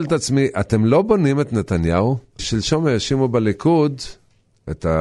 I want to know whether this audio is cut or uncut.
cut